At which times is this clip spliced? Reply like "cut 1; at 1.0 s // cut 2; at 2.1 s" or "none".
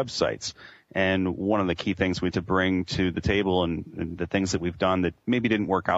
cut 1; at 2.3 s // cut 2; at 4.2 s

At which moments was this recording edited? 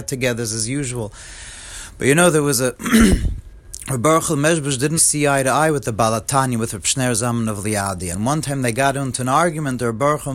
cut 1; at 5.0 s

